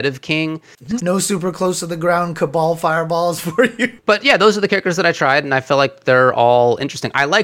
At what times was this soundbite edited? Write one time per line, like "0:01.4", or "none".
0:01.0
0:04.0